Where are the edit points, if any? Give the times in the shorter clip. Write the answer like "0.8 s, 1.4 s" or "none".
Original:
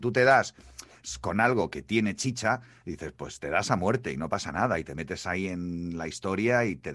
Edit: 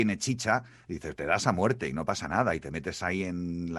1.2 s